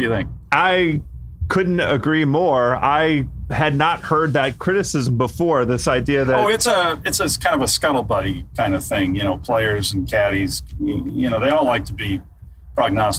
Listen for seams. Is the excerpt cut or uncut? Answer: uncut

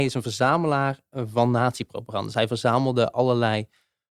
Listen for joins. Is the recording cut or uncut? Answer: uncut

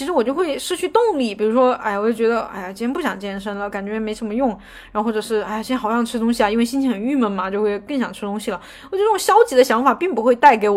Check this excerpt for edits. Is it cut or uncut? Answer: uncut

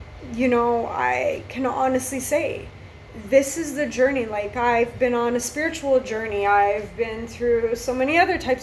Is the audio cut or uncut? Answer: uncut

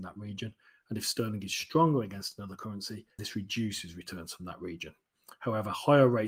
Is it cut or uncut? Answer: cut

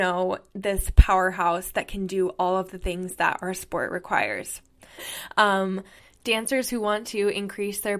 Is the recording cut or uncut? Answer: cut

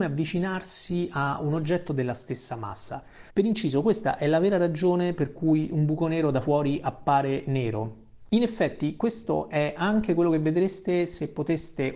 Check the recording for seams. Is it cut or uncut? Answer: cut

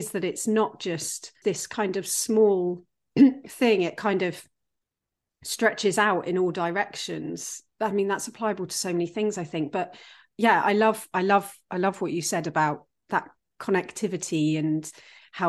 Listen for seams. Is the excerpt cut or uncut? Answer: uncut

